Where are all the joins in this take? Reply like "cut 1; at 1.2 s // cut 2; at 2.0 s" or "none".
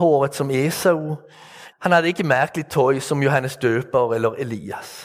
cut 1; at 1.7 s